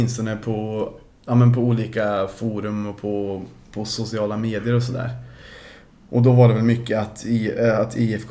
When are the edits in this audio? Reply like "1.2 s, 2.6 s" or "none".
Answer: none